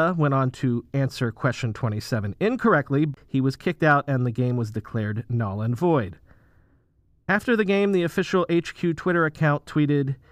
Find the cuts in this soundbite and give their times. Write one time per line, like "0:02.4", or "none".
0:03.2